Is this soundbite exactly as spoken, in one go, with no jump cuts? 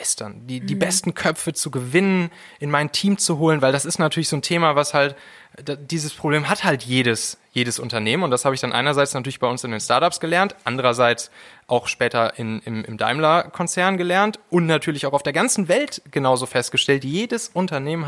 yes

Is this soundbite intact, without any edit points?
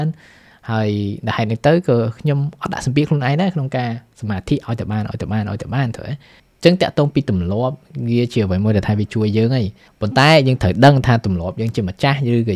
yes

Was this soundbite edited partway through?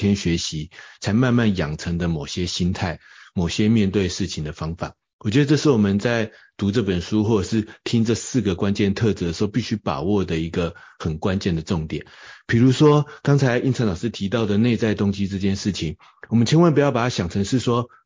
no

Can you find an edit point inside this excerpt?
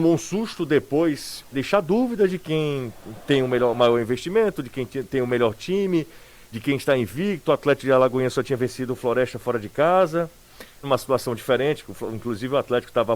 yes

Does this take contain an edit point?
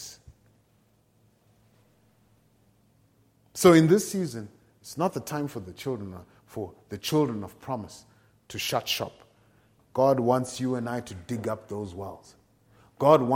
yes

